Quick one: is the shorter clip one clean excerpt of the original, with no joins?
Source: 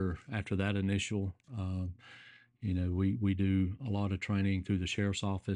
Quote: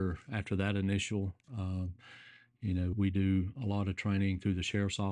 no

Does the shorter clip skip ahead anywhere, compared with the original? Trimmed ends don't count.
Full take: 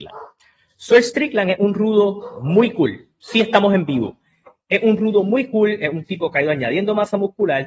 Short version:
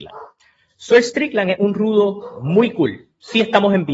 no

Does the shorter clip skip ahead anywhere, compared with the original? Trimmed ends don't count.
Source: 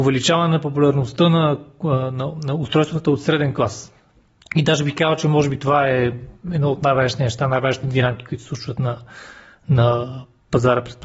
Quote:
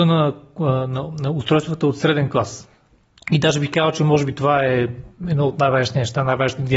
no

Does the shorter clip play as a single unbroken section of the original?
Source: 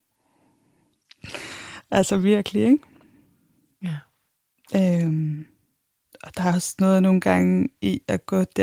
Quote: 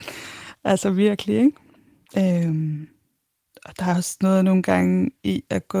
no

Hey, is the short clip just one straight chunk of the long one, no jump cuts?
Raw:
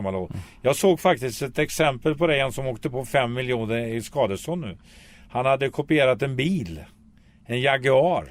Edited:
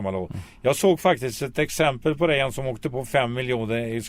yes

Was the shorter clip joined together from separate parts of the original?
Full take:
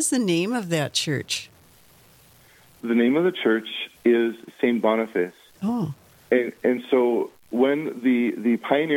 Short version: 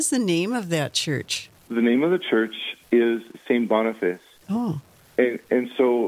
yes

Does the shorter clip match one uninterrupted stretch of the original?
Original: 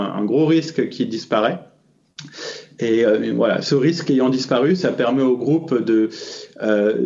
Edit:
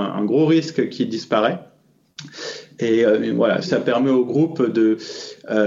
no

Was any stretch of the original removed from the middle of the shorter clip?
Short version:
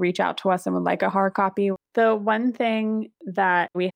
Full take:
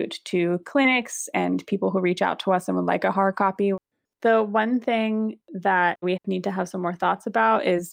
yes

